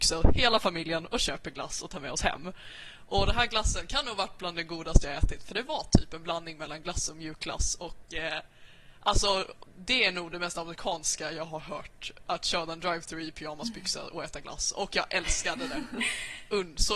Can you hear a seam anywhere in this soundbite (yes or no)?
no